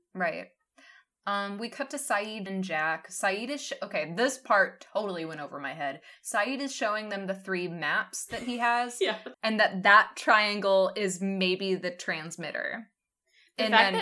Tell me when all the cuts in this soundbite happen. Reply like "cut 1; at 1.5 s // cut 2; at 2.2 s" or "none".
cut 1; at 2.5 s // cut 2; at 9.3 s